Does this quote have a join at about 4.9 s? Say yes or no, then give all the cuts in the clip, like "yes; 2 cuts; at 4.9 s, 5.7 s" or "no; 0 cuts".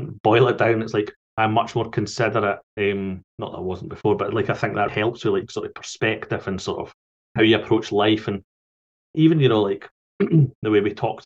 yes; 2 cuts; at 2.7 s, 4.9 s